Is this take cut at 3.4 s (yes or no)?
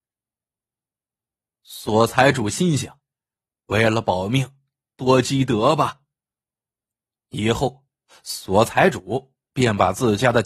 no